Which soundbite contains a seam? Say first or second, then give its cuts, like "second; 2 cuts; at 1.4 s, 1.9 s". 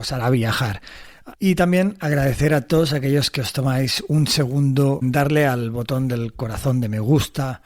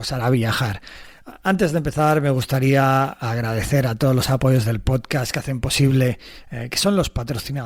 first; 2 cuts; at 1.3 s, 5.0 s